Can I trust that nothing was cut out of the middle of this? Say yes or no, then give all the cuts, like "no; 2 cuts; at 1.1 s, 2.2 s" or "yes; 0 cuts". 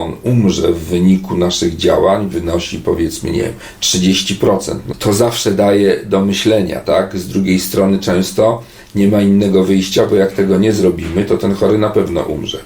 yes; 0 cuts